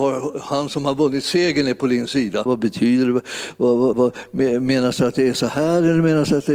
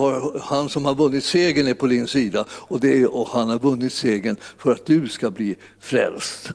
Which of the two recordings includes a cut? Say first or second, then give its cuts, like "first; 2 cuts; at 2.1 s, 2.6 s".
first; 2 cuts; at 2.5 s, 3.9 s